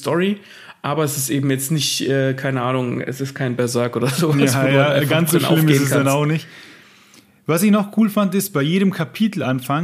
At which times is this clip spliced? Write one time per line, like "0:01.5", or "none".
none